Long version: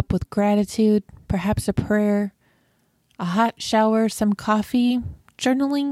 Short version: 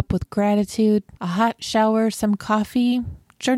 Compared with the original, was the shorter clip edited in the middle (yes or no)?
yes